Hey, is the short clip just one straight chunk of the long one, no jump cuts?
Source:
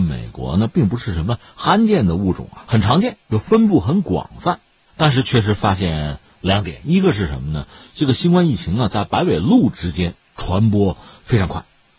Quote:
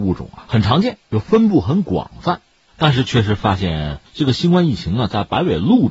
no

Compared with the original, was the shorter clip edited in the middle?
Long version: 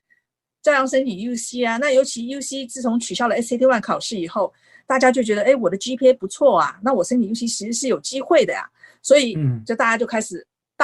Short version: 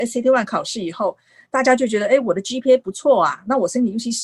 no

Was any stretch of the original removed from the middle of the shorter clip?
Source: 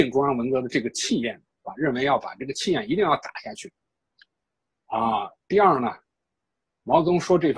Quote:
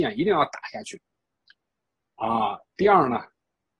no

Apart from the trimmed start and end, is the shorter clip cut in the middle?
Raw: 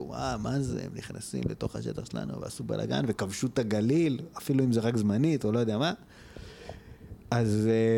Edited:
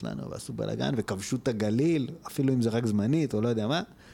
no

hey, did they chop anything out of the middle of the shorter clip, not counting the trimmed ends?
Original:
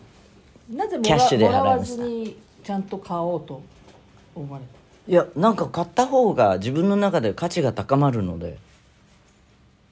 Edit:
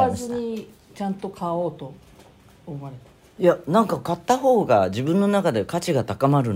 no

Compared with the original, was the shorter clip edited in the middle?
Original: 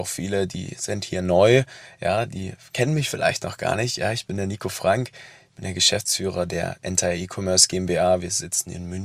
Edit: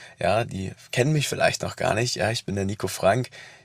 no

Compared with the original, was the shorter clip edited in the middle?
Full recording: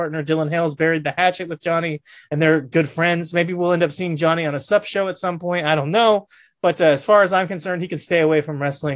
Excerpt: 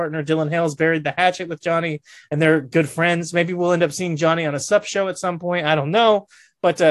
no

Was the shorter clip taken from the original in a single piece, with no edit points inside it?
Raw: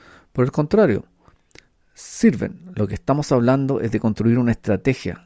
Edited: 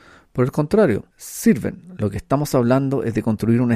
no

